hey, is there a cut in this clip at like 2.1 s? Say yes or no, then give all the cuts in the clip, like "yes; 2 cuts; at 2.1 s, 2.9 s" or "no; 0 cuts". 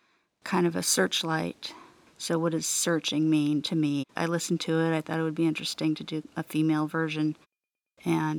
yes; 2 cuts; at 2.1 s, 4.1 s